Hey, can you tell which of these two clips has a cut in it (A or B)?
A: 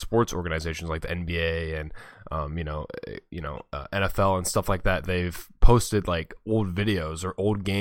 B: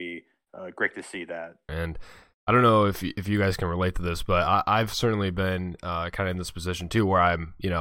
B